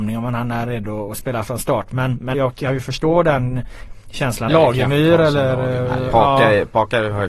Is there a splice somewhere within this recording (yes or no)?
yes